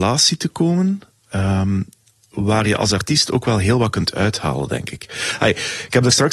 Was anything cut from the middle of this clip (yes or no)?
no